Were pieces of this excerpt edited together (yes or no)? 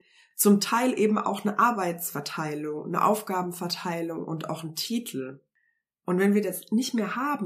no